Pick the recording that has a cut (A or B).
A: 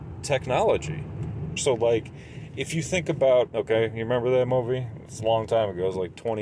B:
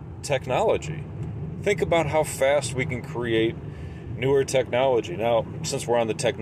A